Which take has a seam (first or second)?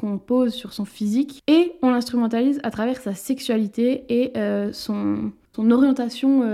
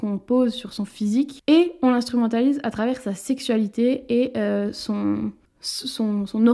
first